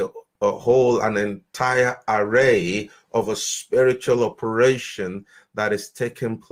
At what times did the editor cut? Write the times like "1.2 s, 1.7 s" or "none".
none